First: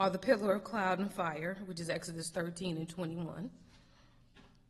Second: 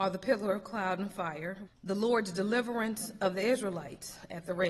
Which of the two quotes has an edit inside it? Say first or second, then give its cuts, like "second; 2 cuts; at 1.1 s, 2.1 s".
second; 1 cut; at 1.7 s